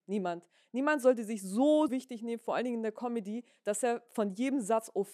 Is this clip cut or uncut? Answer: cut